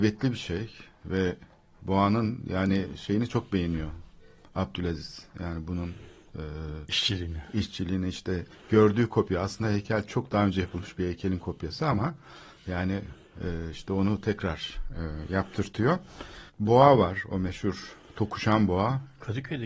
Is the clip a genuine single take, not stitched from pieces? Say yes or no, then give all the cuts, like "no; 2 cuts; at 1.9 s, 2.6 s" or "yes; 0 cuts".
no; 1 cut; at 16.5 s